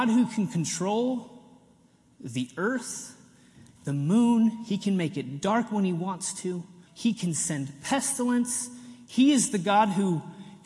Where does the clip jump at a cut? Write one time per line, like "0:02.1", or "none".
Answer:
0:03.8
0:06.9
0:09.1